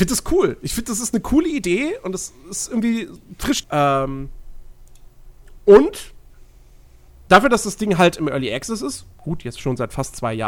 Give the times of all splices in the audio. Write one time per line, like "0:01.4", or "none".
0:03.6

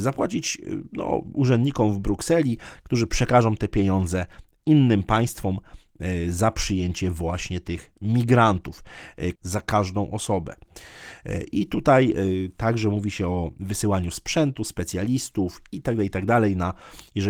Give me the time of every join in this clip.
0:09.4

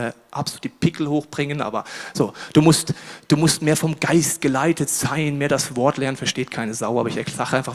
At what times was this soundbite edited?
none

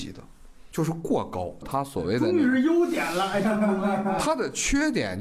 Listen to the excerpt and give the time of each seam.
0:01.6

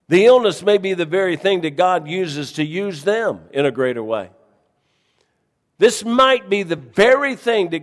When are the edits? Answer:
none

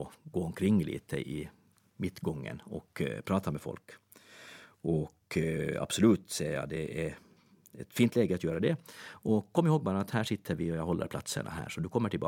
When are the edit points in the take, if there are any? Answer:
none

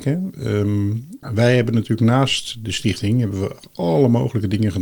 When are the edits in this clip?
0:01.2

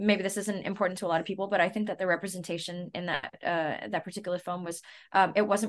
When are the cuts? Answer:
none

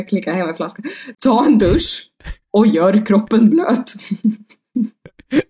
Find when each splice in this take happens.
0:01.1

